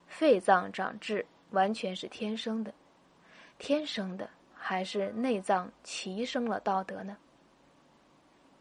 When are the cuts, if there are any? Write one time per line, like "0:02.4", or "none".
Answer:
0:01.4
0:04.5